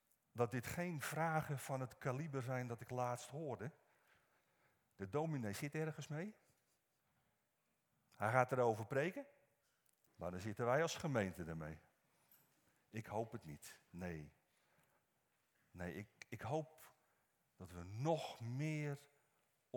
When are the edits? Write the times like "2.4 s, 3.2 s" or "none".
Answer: 10.1 s